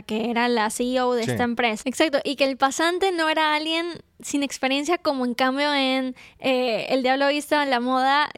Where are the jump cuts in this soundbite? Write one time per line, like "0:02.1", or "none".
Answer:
0:01.8

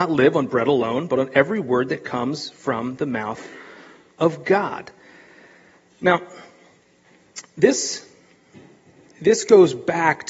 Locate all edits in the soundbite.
none

